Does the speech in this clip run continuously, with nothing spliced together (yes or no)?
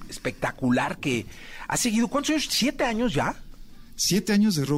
yes